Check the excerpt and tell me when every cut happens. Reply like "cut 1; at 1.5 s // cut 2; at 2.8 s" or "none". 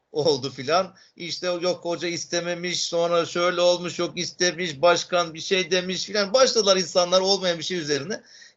none